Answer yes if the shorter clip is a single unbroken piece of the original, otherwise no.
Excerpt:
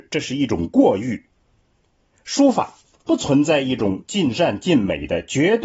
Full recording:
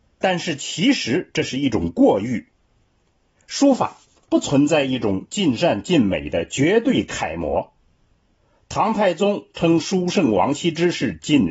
yes